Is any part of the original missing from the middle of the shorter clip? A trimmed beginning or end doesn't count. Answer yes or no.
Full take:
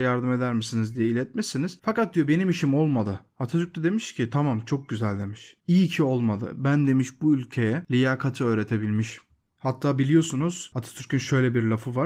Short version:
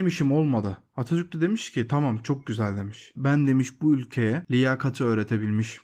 yes